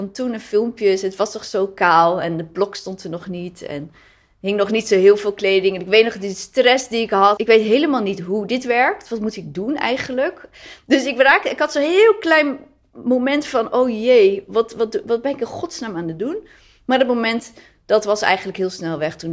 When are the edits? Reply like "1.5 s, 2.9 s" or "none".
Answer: 7.4 s